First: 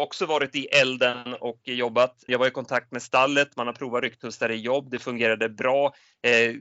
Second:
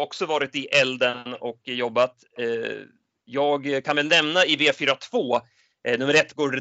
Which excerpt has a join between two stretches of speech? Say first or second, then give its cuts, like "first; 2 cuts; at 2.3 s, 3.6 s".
first; 1 cut; at 2.3 s